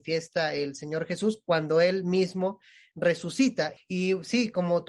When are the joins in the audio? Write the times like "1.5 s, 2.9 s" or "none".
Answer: 3.8 s